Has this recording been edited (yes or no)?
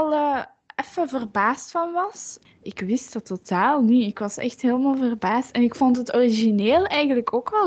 yes